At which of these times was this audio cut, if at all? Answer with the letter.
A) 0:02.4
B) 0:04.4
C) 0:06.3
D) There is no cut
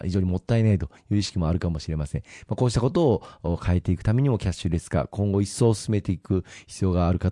D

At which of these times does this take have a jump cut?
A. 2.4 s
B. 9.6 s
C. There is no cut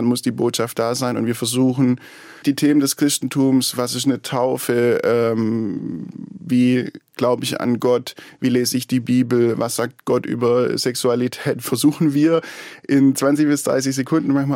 A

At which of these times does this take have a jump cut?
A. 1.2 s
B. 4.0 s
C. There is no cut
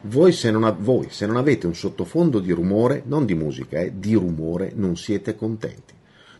C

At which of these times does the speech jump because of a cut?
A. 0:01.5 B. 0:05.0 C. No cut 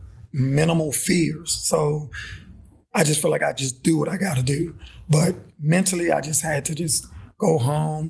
C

